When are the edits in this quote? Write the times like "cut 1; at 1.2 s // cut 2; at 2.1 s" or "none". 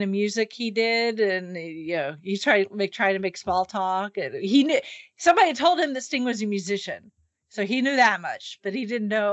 none